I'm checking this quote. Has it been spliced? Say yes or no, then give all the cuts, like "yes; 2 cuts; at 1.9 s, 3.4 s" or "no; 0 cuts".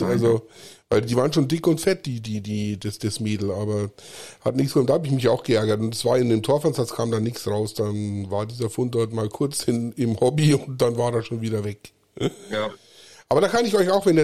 no; 0 cuts